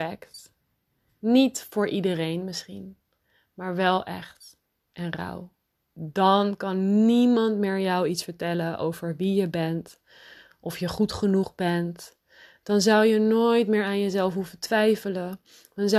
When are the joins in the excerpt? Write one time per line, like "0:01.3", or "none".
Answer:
0:05.7